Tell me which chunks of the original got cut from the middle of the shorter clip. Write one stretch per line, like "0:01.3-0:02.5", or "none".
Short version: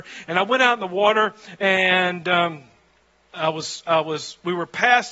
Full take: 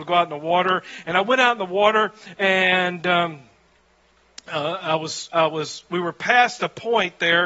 0:04.1-0:04.8